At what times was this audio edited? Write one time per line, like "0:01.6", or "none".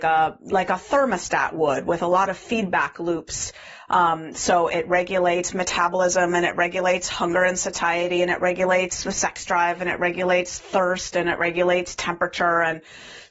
0:03.8